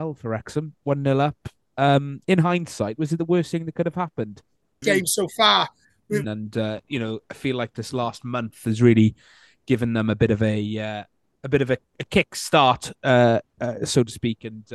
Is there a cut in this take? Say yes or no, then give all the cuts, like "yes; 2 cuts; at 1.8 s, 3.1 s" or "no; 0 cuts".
yes; 2 cuts; at 4.8 s, 6.2 s